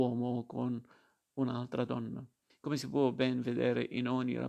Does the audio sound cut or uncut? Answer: cut